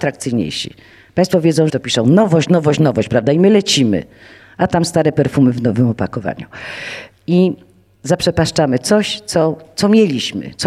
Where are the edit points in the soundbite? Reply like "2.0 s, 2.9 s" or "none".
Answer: 1.7 s, 7.2 s